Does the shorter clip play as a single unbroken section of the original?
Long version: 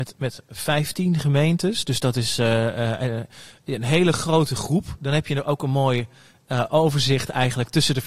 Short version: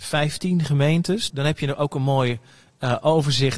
no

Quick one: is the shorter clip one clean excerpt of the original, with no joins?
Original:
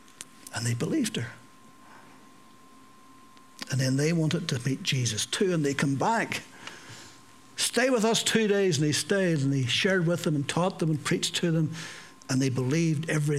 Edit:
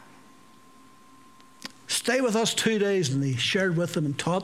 no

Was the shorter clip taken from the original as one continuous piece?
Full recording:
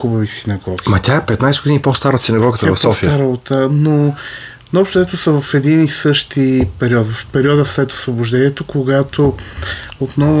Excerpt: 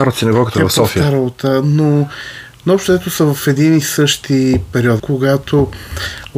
no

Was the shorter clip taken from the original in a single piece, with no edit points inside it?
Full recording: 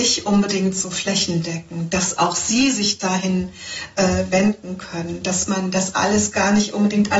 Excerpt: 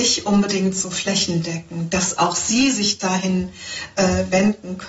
yes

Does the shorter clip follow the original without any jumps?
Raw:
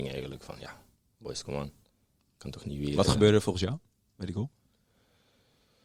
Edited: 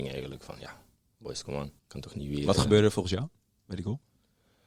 no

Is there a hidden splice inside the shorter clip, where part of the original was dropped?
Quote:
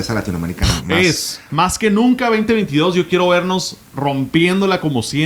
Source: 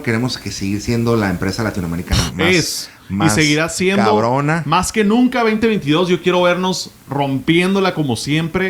yes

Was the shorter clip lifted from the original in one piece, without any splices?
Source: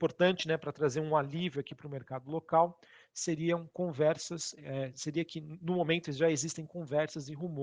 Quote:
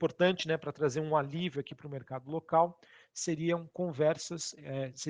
yes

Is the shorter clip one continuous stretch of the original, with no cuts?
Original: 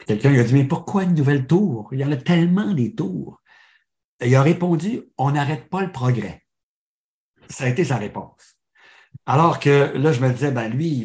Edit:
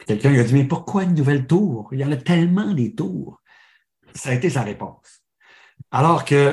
no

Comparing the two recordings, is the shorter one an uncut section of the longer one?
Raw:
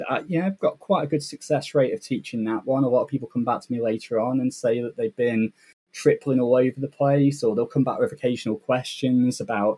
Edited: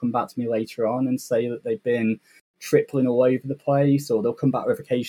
yes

